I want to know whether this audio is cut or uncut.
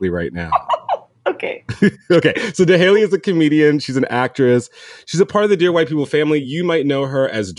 uncut